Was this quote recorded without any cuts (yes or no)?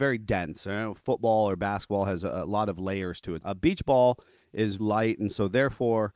no